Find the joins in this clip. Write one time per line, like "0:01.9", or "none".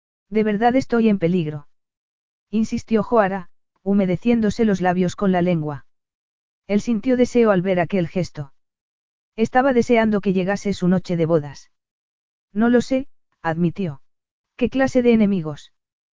0:14.4